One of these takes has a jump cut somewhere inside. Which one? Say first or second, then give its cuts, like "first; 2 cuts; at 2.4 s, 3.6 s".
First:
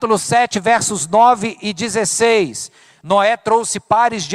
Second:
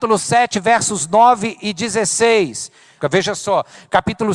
second; 1 cut; at 3.0 s